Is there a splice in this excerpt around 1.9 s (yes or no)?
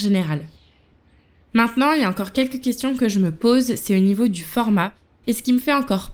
no